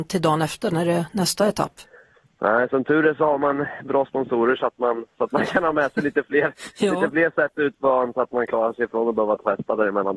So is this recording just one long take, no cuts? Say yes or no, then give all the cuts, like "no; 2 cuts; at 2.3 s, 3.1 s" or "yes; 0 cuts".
yes; 0 cuts